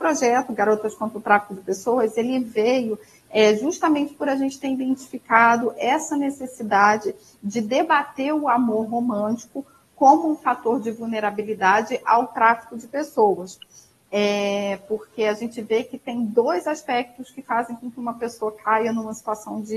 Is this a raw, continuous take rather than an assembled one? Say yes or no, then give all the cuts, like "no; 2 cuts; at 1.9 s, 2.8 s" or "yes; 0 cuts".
yes; 0 cuts